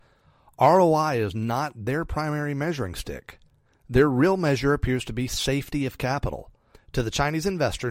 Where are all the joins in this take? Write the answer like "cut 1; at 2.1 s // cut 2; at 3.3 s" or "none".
cut 1; at 6.7 s